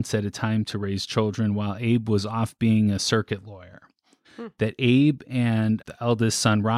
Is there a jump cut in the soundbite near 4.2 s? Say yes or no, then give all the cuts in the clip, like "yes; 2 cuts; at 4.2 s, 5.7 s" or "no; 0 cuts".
yes; 2 cuts; at 4.2 s, 5.8 s